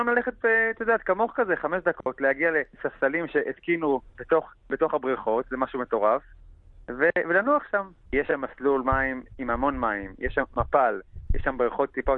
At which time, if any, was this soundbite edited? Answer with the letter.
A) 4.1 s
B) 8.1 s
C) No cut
B